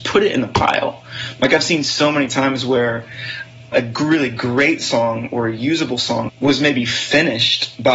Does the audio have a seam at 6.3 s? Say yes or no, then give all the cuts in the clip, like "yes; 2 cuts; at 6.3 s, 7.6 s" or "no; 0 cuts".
yes; 2 cuts; at 3.7 s, 6.3 s